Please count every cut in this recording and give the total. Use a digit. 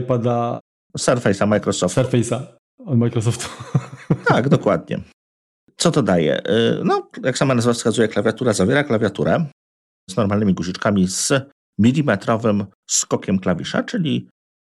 0